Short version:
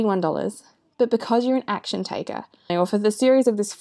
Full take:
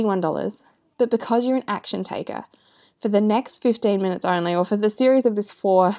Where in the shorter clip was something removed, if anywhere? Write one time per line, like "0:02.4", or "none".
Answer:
0:02.7